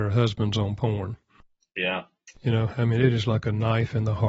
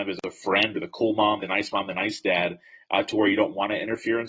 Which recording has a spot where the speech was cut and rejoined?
second; 1 cut; at 1.4 s

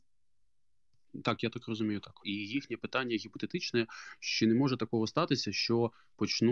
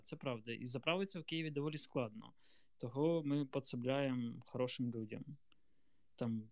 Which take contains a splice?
first; 1 cut; at 2.2 s

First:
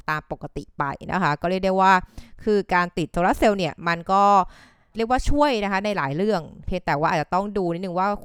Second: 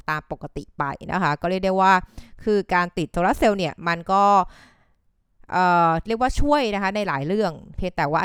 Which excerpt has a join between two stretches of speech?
first; 1 cut; at 4.9 s

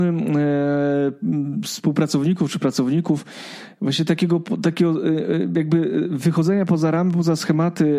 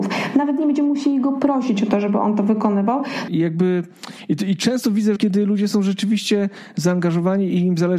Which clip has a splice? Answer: second; 2 cuts; at 3.3 s, 5.2 s

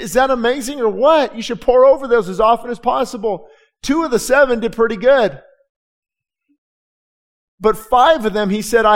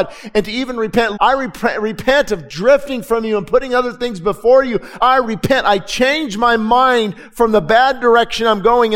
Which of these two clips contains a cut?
second; 2 cuts; at 1.2 s, 5.0 s

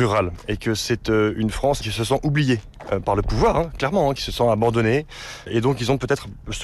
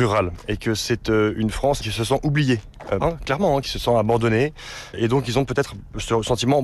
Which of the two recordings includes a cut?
second; 1 cut; at 3.0 s

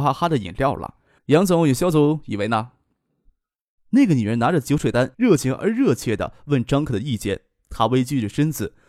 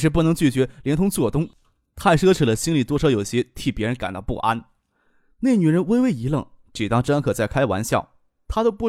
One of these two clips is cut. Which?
first; 3 cuts; at 1.2 s, 3.8 s, 5.1 s

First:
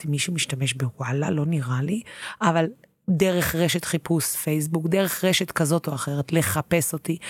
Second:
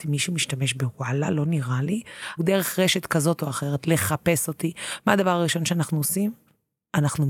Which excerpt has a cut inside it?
second; 1 cut; at 2.4 s

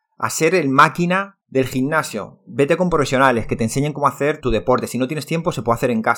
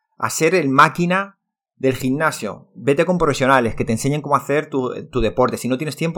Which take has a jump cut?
first; 2 cuts; at 1.4 s, 4.4 s

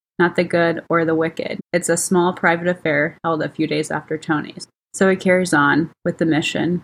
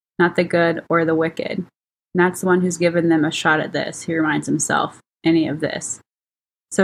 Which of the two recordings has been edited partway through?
first; 2 cuts; at 1.6 s, 4.7 s

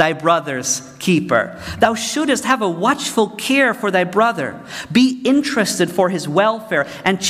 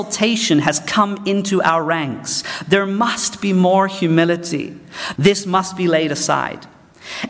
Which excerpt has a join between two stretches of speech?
second; 1 cut; at 5.2 s

